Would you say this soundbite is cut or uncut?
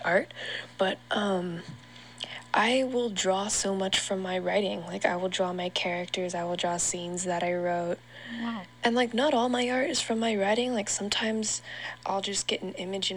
uncut